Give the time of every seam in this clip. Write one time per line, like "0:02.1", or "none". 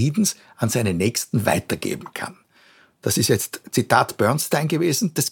none